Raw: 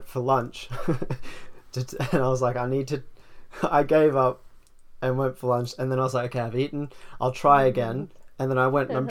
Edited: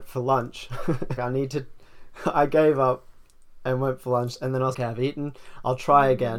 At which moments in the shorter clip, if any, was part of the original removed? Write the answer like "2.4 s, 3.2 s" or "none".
1.2 s, 4.7 s